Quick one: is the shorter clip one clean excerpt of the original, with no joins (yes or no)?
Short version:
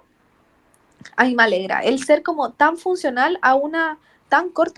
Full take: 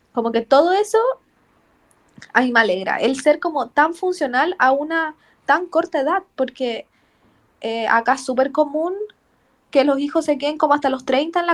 yes